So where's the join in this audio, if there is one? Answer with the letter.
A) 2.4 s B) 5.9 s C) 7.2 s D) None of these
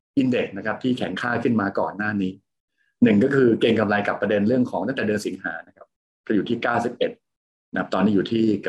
D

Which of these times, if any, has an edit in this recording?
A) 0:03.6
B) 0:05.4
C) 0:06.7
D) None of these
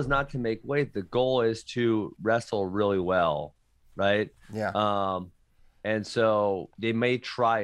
C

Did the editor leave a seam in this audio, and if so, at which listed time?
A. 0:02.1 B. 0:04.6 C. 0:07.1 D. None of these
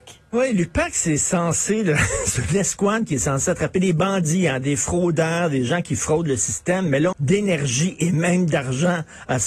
C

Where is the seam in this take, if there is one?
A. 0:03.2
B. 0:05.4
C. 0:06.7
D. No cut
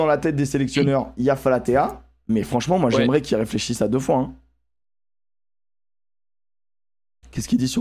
D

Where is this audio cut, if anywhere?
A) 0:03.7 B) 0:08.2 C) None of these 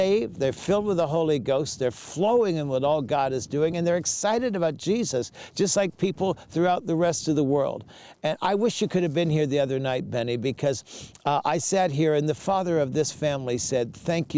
C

